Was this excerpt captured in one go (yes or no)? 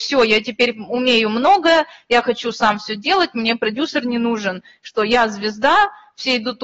yes